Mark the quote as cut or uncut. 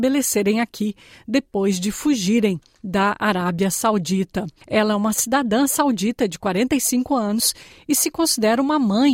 uncut